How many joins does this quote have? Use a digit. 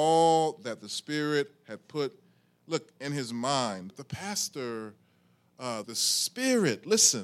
2